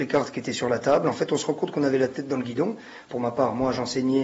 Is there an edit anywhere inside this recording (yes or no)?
no